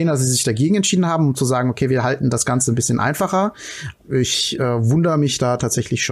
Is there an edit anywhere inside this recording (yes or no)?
yes